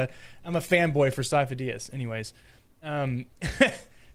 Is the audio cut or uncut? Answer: uncut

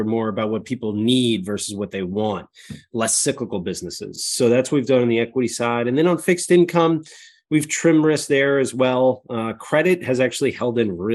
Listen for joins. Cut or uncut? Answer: uncut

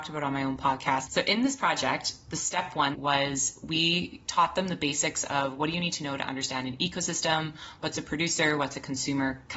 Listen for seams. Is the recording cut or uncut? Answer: cut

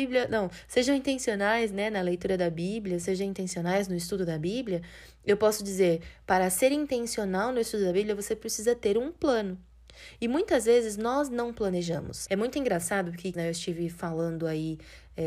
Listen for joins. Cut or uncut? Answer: cut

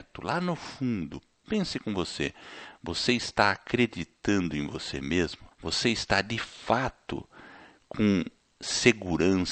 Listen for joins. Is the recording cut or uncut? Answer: cut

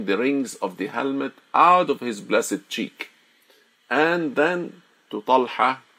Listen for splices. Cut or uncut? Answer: uncut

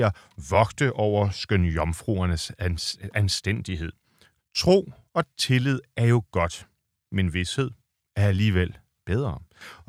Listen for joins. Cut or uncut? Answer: cut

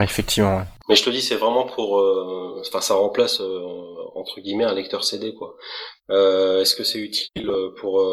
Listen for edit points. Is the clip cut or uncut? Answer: cut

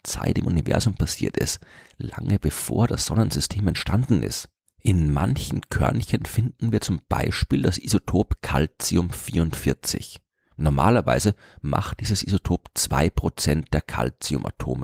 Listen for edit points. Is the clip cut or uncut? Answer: uncut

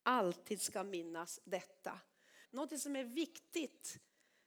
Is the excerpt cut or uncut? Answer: cut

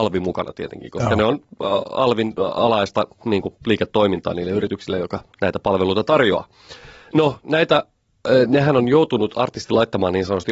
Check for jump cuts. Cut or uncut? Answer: uncut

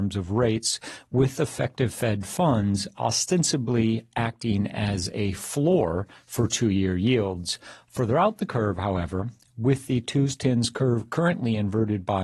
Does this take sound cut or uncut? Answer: uncut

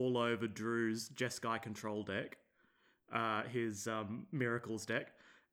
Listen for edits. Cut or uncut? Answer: uncut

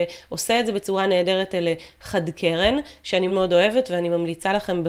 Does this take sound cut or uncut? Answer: cut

